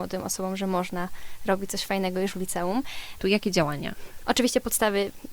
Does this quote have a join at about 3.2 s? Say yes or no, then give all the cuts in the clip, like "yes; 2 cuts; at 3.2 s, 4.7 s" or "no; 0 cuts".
yes; 2 cuts; at 3.2 s, 4.2 s